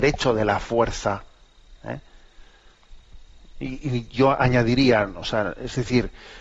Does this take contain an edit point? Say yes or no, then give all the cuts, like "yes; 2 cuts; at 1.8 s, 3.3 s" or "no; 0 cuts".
no; 0 cuts